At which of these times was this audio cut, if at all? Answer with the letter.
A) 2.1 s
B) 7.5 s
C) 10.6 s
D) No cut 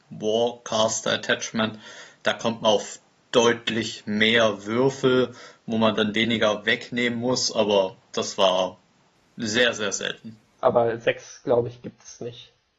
C